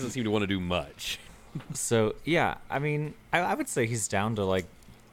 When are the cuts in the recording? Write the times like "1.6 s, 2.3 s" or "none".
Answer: 3.2 s